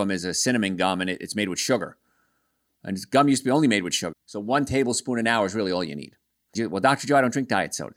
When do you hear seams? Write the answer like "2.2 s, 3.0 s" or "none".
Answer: 4.1 s, 6.5 s